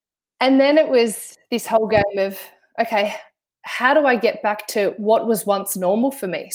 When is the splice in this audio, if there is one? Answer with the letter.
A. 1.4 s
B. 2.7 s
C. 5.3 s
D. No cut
D